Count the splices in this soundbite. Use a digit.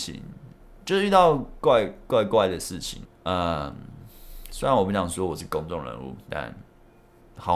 1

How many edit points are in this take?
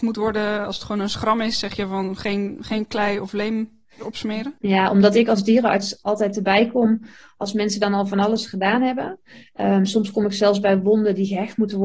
1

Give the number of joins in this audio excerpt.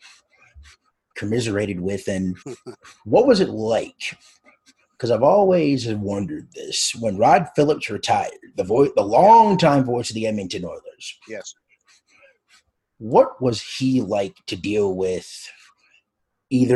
1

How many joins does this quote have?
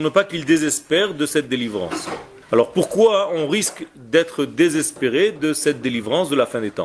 1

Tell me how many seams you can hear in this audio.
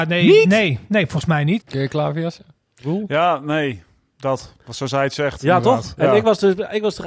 1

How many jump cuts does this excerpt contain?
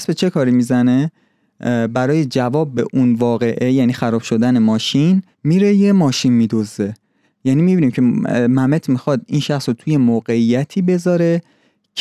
1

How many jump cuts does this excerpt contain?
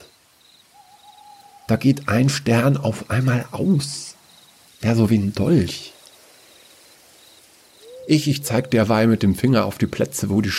2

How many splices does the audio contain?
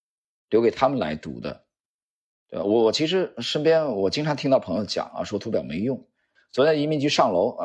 1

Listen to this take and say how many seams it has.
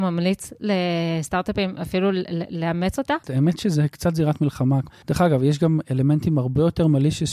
2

